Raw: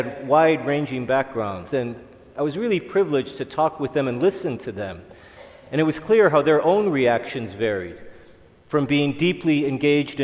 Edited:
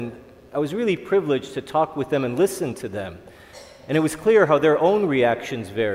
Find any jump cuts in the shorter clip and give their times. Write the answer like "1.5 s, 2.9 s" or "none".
none